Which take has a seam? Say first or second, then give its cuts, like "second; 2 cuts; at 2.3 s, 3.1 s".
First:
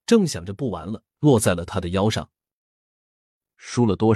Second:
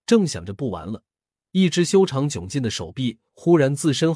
first; 1 cut; at 1.2 s